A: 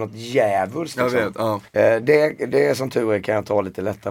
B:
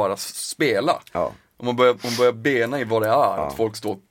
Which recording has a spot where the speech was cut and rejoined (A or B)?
A